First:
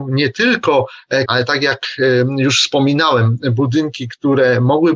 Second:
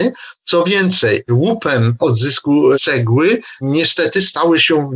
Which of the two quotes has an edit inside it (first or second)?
first